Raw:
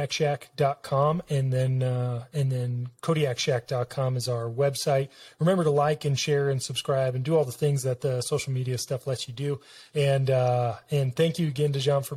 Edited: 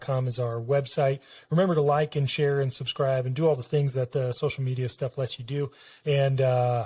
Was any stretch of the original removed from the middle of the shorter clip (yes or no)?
no